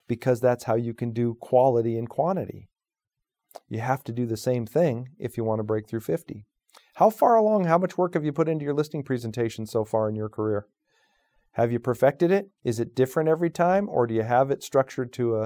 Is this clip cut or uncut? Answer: cut